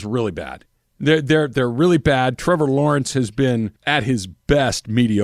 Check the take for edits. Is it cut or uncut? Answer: cut